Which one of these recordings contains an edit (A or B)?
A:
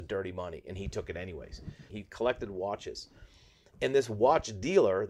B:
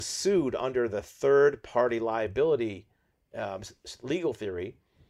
A